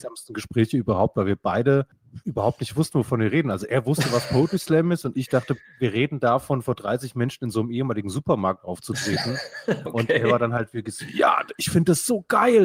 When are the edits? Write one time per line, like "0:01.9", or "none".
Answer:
none